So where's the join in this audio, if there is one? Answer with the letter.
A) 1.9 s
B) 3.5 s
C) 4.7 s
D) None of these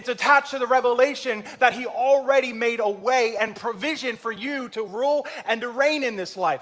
C